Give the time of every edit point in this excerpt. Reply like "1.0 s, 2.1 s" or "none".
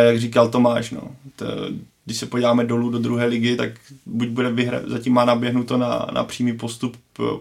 none